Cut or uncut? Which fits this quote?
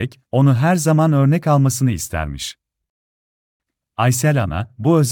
cut